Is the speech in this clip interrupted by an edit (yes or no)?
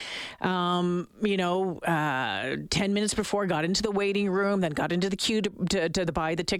no